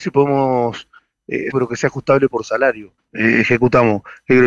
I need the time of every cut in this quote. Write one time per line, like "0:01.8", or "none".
0:01.5
0:03.0